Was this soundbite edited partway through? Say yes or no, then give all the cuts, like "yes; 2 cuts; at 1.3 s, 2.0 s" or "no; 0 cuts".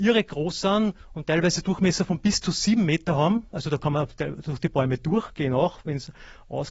no; 0 cuts